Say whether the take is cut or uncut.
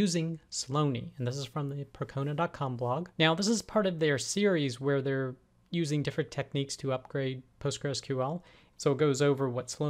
cut